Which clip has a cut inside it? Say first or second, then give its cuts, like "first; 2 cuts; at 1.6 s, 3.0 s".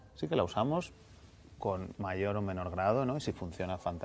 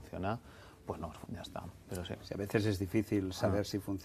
second; 1 cut; at 1.3 s